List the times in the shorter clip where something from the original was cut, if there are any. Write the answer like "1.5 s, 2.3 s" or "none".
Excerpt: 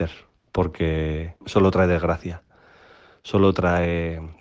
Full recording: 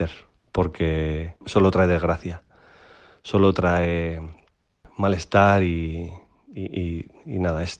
none